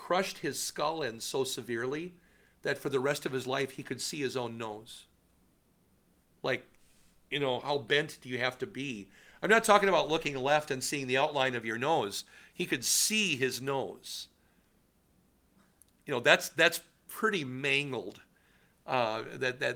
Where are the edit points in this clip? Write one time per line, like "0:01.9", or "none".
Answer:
0:07.6